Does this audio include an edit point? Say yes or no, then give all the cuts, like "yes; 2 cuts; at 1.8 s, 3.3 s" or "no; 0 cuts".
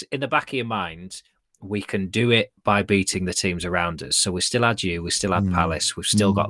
no; 0 cuts